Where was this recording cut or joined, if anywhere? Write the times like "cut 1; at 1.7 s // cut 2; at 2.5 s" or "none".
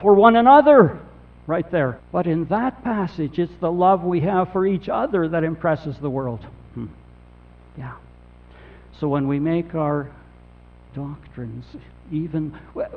cut 1; at 2.0 s